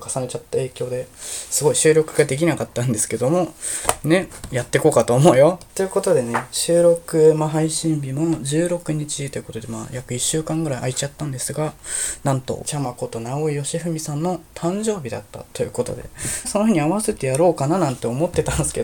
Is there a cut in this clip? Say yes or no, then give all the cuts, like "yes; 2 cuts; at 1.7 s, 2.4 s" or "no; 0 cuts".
yes; 3 cuts; at 5.7 s, 12.6 s, 16.4 s